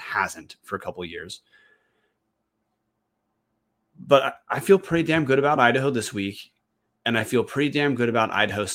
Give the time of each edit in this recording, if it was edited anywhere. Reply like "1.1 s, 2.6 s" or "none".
none